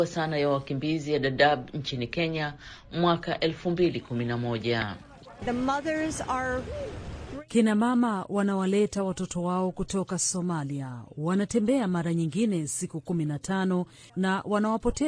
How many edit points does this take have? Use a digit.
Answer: 1